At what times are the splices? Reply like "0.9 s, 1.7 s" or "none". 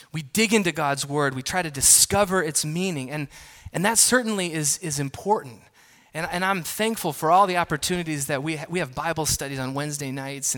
none